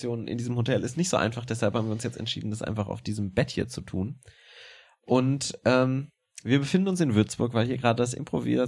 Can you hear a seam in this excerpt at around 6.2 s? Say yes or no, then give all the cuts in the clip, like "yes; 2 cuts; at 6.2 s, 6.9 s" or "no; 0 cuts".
no; 0 cuts